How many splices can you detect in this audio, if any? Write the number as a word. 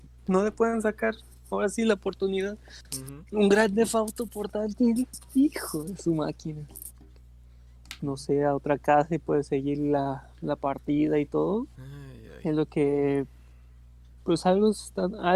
two